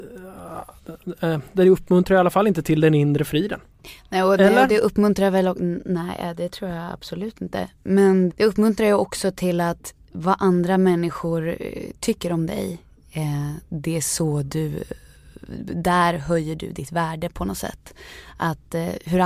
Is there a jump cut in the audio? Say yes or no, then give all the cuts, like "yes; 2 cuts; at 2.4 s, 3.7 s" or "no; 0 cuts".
yes; 1 cut; at 8.3 s